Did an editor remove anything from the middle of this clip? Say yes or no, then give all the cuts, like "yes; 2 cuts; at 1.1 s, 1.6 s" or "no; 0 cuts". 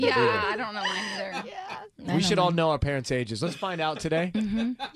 no; 0 cuts